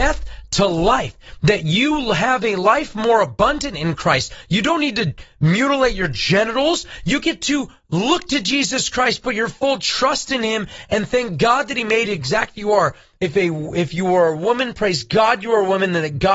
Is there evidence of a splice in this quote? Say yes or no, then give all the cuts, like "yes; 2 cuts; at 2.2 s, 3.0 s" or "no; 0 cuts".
no; 0 cuts